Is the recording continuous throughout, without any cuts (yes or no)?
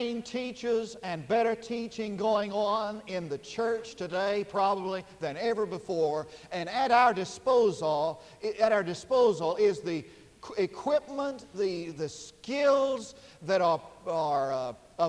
no